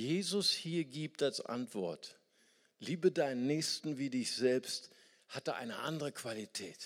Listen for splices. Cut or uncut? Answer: uncut